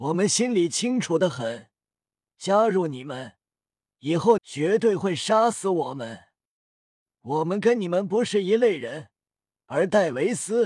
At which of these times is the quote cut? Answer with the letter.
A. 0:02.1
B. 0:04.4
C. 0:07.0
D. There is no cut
B